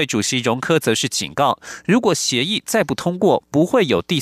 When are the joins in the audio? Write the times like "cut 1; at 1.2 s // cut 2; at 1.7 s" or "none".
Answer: none